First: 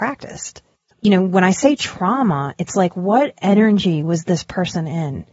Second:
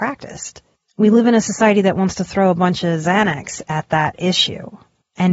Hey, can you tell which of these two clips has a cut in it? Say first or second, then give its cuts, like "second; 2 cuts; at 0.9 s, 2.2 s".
first; 1 cut; at 0.9 s